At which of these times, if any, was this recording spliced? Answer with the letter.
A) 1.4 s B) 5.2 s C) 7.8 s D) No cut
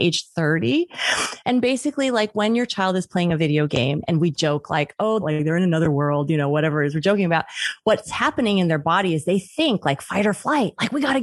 B